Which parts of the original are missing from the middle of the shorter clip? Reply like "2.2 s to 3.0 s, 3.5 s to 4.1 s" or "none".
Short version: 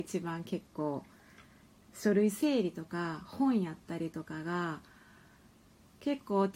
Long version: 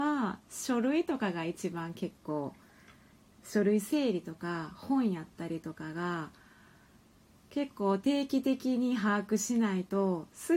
none